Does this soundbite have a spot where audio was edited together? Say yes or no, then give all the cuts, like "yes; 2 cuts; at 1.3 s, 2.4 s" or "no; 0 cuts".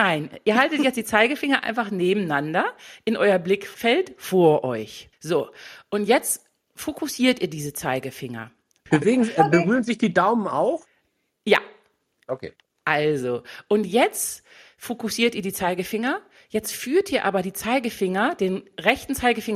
no; 0 cuts